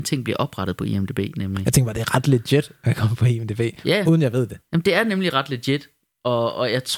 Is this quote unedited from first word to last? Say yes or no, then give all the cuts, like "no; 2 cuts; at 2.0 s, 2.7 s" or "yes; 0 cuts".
yes; 0 cuts